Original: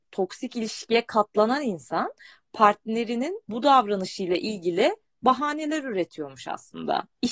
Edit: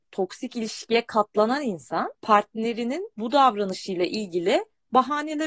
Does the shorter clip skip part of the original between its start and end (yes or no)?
yes